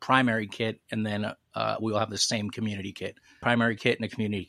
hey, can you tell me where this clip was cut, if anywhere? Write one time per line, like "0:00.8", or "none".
0:03.4